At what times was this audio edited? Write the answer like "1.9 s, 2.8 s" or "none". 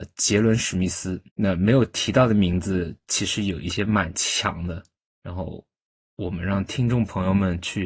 1.3 s